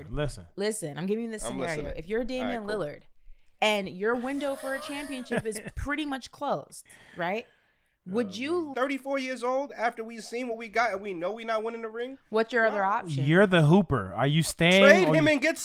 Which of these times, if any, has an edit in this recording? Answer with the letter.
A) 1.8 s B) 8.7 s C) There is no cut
B